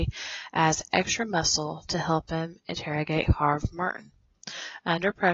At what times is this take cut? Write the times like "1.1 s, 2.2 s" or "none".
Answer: none